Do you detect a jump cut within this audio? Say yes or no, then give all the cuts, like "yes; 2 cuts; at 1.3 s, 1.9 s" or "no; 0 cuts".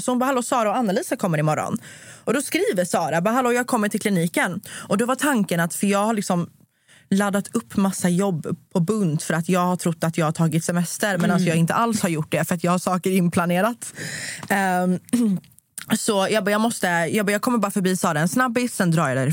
no; 0 cuts